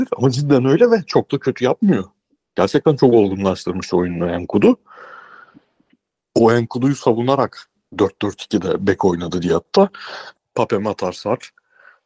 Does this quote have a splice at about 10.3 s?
yes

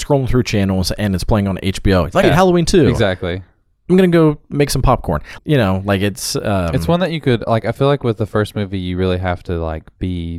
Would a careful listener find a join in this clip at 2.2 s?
yes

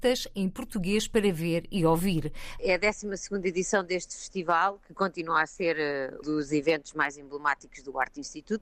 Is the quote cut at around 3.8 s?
no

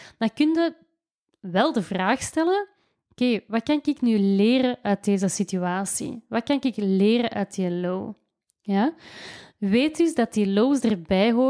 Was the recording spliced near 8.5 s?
no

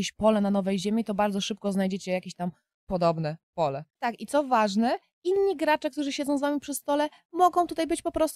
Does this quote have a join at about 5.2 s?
no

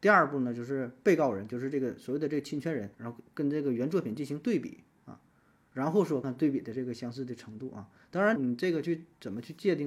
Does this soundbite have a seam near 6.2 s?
yes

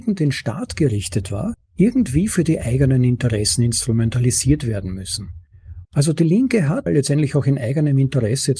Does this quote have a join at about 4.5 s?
no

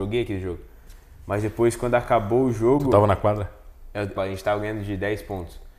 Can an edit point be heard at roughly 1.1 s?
no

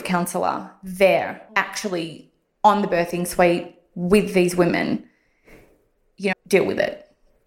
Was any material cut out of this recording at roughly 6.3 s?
yes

